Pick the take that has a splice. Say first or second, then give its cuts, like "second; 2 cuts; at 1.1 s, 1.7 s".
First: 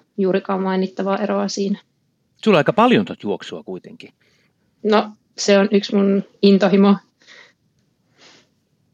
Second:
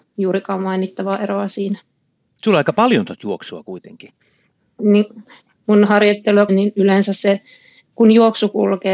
second; 2 cuts; at 4.8 s, 6.5 s